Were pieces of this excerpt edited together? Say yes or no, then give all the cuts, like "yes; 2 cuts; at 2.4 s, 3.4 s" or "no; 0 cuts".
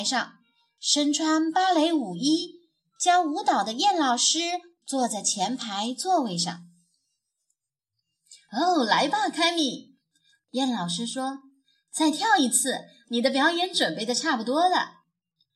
no; 0 cuts